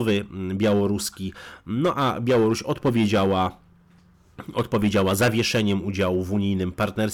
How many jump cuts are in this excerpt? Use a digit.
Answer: 0